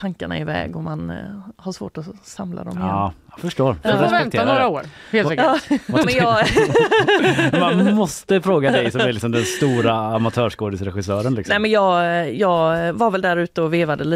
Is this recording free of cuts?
no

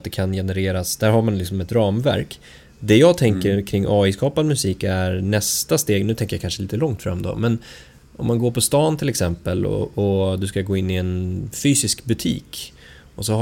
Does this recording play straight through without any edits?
yes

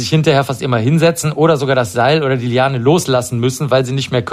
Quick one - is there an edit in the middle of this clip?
no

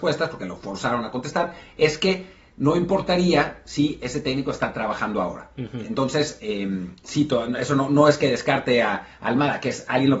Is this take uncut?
yes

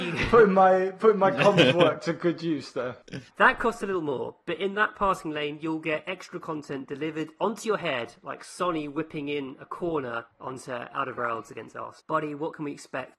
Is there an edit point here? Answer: no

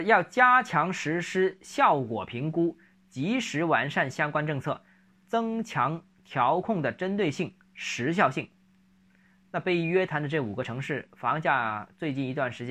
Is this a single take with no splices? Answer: yes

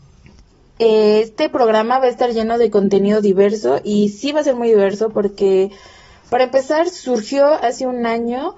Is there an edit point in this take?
no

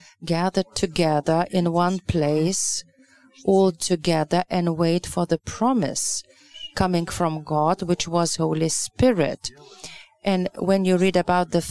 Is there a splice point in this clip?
no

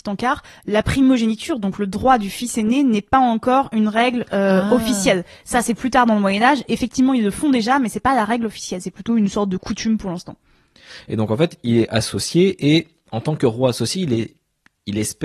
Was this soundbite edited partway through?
no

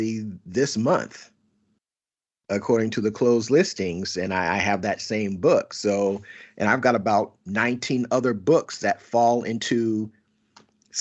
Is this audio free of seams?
yes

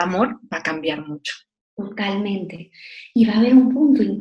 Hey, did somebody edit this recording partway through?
no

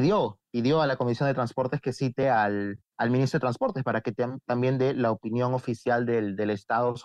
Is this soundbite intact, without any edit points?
yes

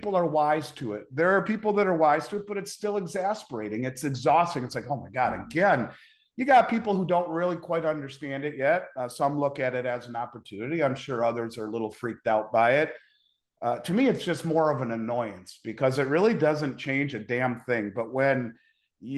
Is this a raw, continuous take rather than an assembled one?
yes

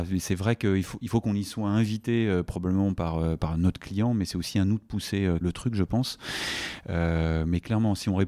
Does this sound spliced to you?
yes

